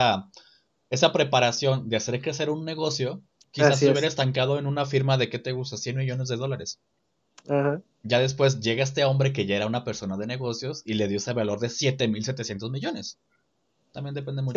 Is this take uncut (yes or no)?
yes